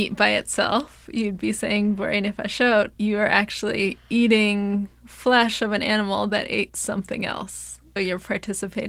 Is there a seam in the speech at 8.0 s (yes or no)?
yes